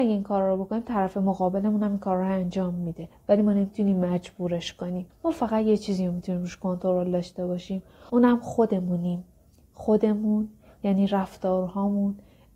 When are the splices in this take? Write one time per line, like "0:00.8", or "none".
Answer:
0:08.1